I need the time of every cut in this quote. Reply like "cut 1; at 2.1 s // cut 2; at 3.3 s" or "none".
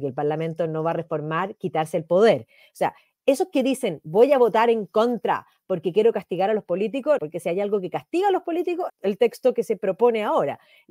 cut 1; at 7.2 s // cut 2; at 8.9 s